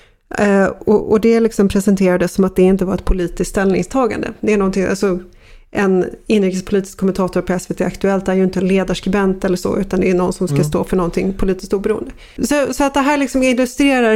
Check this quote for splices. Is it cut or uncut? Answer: uncut